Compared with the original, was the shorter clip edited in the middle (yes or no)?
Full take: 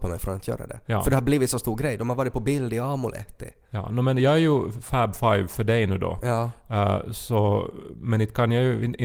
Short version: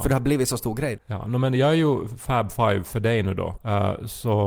yes